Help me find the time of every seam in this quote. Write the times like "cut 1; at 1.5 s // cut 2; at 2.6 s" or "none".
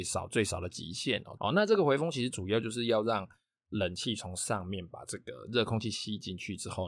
cut 1; at 1.4 s